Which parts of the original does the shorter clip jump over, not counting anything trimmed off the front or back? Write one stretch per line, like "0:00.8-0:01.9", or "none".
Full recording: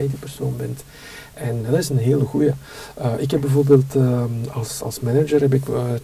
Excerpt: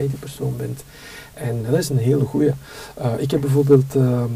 none